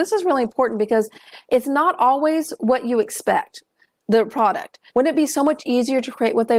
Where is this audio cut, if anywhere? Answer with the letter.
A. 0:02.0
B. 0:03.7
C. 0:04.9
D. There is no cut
C